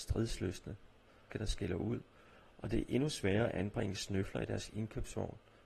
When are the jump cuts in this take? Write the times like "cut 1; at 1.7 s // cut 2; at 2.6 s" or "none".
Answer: cut 1; at 1.3 s